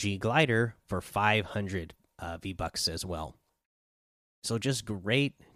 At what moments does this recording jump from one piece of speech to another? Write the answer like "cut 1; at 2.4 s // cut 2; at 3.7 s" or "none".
none